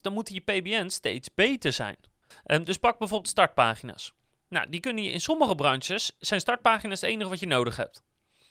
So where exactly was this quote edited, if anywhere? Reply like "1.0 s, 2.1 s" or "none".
2.3 s